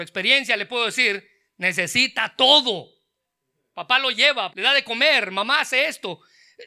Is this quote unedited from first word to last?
no; 1 cut; at 4.5 s

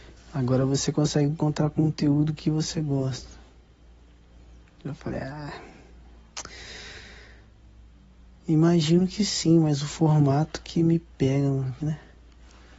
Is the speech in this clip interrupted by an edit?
yes; 1 cut; at 11.8 s

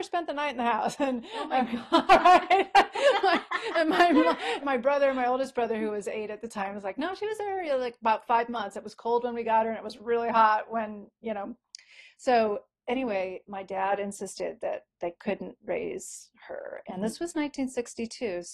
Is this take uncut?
no; 1 cut; at 4.6 s

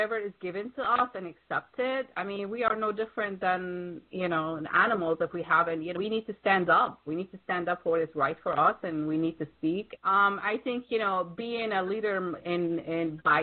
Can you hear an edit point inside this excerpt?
yes; 3 cuts; at 6.0 s, 10.0 s, 12.4 s

